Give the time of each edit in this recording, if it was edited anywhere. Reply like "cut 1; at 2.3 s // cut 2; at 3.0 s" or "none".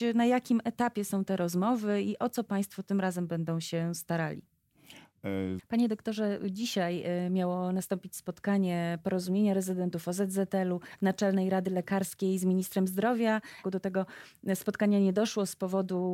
cut 1; at 5.6 s // cut 2; at 13.6 s